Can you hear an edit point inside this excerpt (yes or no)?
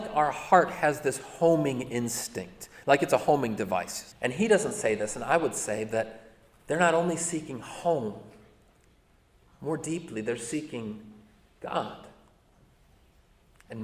yes